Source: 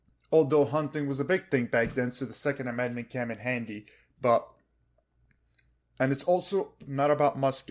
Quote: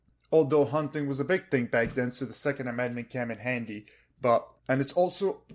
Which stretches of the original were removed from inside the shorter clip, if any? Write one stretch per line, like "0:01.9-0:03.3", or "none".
0:04.6-0:05.9